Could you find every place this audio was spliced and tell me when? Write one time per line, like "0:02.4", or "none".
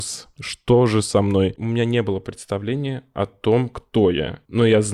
none